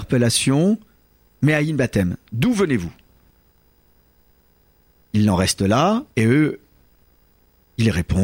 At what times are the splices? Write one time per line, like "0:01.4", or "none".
0:06.1